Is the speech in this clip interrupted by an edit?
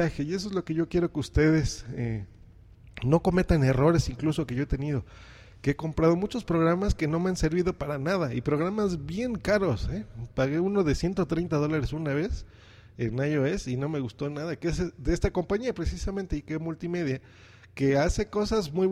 no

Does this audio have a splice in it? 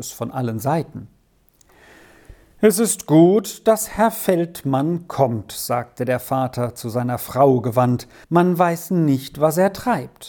yes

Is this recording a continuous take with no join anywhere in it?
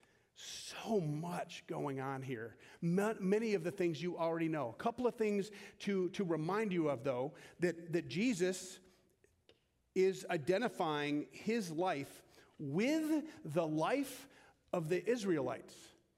yes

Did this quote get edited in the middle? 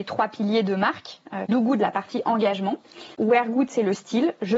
yes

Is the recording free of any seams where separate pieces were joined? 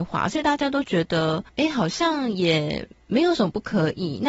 no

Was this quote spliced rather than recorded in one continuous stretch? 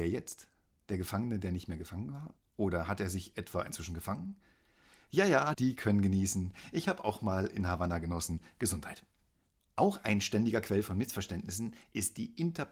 yes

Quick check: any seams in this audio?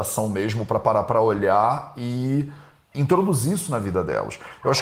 no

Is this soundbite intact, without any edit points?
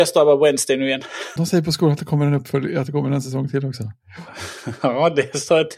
no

